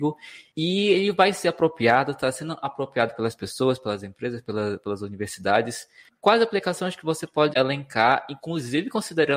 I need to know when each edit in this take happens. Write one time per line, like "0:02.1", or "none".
0:07.5